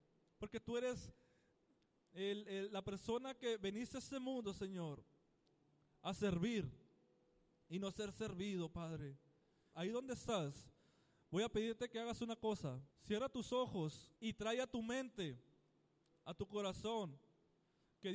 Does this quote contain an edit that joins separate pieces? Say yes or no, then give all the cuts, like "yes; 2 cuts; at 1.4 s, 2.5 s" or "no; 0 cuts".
yes; 3 cuts; at 9.7 s, 12.9 s, 14.2 s